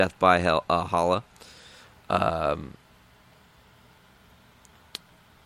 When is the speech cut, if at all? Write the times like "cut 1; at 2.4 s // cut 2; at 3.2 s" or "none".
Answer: none